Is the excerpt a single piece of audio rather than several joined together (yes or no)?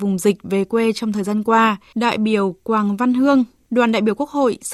no